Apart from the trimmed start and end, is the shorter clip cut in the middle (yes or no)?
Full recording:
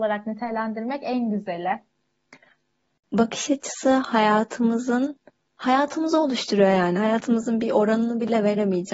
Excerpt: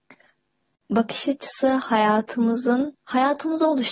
yes